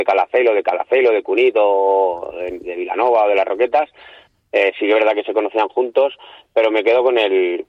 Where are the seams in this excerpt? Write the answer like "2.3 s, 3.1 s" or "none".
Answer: none